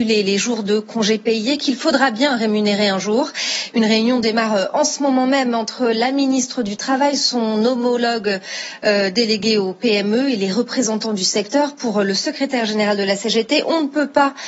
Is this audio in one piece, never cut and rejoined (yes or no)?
yes